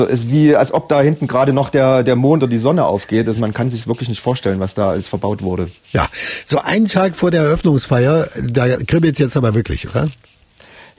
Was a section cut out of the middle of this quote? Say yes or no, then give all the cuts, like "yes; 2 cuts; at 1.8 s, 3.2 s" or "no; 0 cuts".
no; 0 cuts